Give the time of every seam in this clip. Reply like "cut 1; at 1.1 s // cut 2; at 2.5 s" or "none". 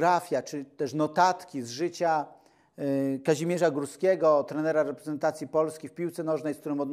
none